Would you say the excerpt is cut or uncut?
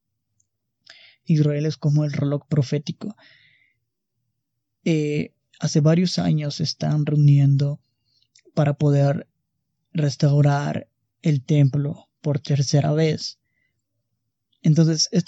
cut